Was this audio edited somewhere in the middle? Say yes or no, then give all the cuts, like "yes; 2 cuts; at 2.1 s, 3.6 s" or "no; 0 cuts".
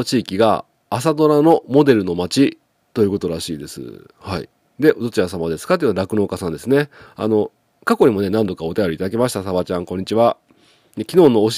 no; 0 cuts